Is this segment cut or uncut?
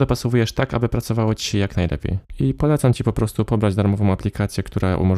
uncut